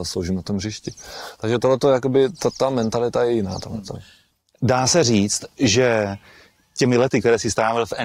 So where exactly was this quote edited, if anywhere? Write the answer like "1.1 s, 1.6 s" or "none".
none